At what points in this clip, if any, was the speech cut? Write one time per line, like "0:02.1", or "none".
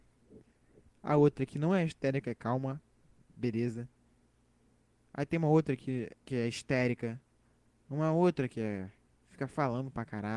0:06.2